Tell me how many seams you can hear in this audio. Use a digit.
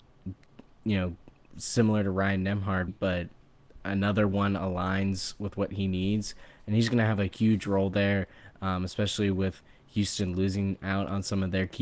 1